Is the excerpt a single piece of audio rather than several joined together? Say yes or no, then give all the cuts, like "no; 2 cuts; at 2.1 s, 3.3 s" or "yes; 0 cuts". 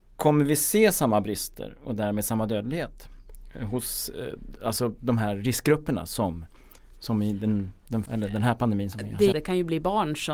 no; 2 cuts; at 8.1 s, 9.3 s